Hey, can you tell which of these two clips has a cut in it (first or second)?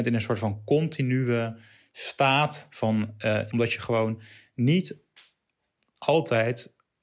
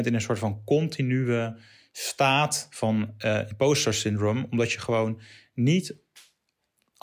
first